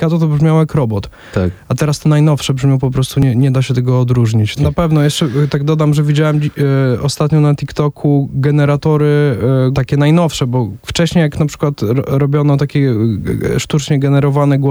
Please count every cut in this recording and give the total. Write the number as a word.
two